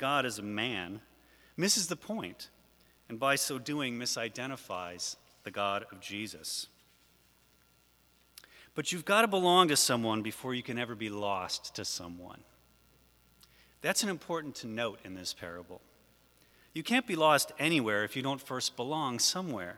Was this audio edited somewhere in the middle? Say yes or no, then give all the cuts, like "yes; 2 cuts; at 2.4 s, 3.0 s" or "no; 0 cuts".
no; 0 cuts